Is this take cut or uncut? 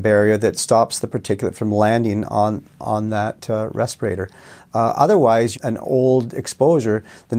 cut